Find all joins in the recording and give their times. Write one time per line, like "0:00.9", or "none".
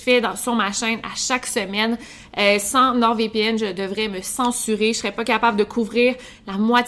none